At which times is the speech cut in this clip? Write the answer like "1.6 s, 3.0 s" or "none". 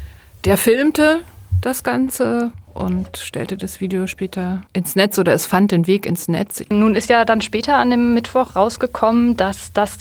4.7 s